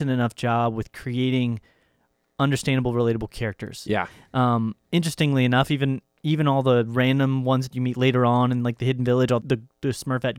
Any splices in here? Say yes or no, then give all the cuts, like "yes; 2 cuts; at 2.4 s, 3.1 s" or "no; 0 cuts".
yes; 2 cuts; at 3.9 s, 9.4 s